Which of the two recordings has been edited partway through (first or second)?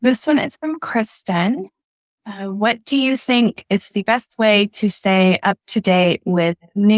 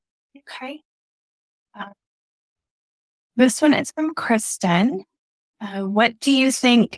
second